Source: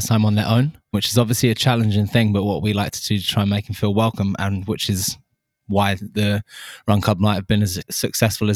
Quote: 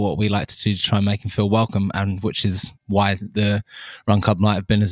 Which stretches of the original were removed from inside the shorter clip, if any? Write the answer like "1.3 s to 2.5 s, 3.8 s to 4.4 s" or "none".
5.2 s to 5.6 s